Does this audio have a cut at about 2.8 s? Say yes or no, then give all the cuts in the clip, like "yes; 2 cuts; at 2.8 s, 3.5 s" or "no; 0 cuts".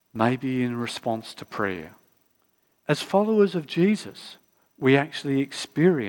yes; 1 cut; at 2.8 s